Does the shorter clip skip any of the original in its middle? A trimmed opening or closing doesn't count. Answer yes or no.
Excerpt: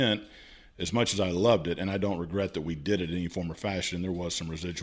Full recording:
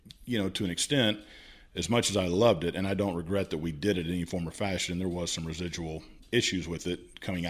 no